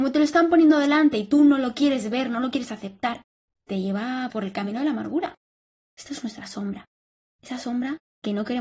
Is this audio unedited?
yes; 0 cuts

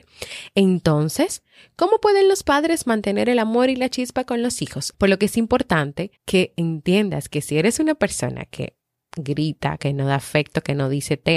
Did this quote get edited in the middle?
yes; 3 cuts; at 4.9 s, 6.2 s, 9.8 s

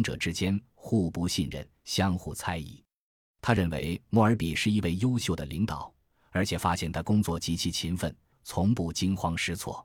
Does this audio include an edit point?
yes; 1 cut; at 8.3 s

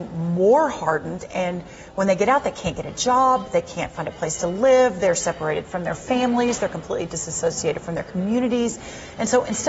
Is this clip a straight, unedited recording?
yes; 0 cuts

